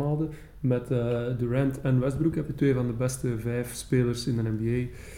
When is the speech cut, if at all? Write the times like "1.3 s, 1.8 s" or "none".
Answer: none